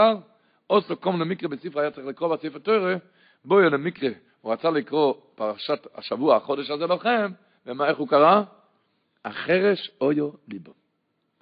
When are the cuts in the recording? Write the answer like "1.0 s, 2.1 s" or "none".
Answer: none